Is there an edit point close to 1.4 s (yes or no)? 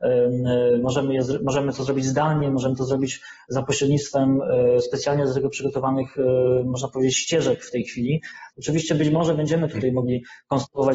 no